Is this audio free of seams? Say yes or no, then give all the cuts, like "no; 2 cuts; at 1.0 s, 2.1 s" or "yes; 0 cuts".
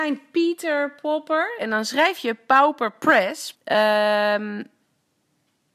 no; 2 cuts; at 1.6 s, 3.5 s